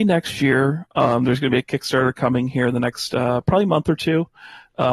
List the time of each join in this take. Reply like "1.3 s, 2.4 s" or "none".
none